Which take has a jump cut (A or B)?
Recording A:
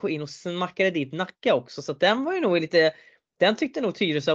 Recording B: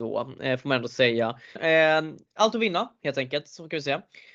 B